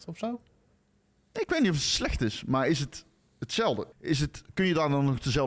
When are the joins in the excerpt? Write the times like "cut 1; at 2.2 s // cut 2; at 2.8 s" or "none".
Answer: cut 1; at 3.9 s